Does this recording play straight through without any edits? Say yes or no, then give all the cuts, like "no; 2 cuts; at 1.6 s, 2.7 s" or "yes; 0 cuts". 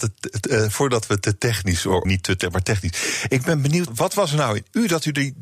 no; 2 cuts; at 2.0 s, 3.9 s